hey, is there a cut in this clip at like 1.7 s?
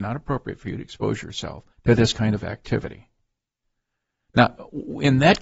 yes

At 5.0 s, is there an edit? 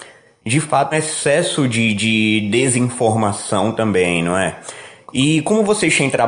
no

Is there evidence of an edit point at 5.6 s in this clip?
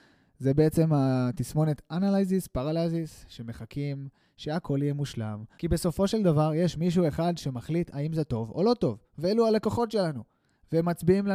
yes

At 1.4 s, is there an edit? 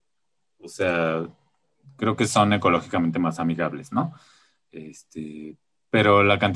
no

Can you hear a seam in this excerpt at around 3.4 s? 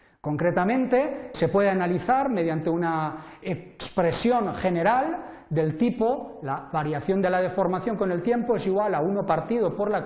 yes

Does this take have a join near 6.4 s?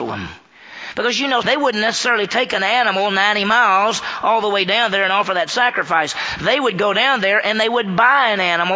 no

